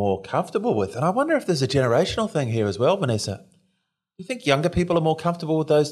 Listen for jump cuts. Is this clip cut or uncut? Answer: uncut